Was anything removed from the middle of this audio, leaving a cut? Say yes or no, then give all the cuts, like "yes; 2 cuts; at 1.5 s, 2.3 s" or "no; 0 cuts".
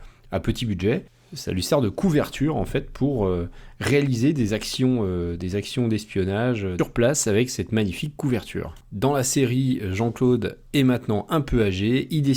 no; 0 cuts